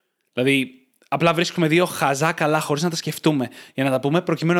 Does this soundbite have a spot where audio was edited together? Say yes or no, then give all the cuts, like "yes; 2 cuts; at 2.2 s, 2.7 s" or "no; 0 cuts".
no; 0 cuts